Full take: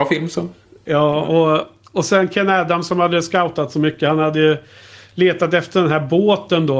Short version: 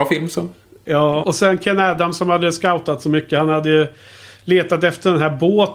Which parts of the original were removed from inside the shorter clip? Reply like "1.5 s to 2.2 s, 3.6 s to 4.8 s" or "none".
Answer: 1.2 s to 1.9 s